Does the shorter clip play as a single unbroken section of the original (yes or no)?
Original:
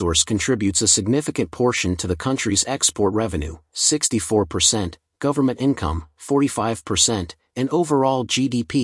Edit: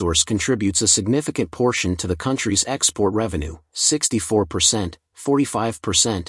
no